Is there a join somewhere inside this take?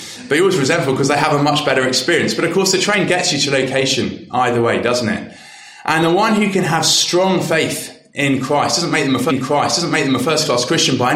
no; 0 cuts

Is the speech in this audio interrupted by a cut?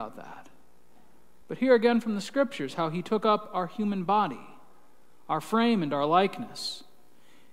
yes; 1 cut; at 1.4 s

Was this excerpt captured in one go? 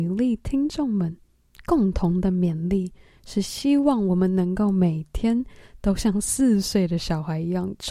yes; 0 cuts

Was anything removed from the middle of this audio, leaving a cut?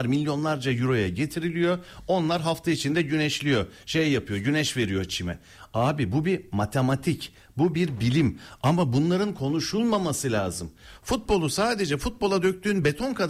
no; 0 cuts

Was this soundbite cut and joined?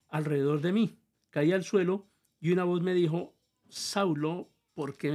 no; 0 cuts

